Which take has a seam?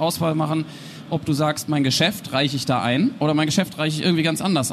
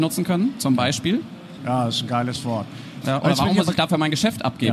second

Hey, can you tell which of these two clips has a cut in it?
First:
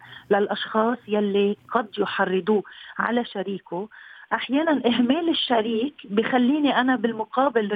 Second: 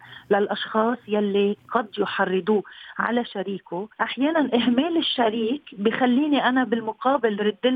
second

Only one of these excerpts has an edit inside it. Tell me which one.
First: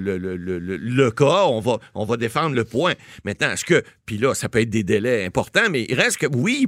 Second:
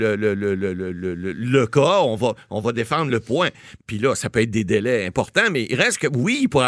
second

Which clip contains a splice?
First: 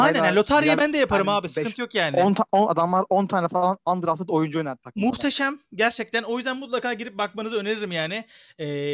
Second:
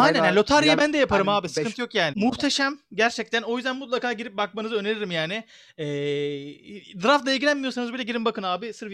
second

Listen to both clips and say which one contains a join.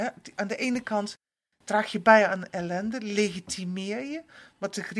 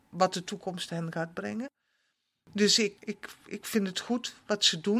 second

